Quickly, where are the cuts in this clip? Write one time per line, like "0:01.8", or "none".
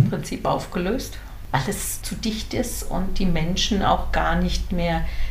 0:02.0